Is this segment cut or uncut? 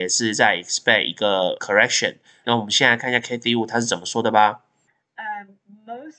uncut